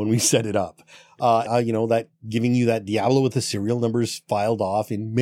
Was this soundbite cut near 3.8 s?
no; 1 cut; at 1.5 s

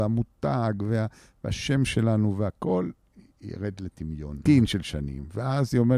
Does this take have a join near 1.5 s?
no; 1 cut; at 4.5 s

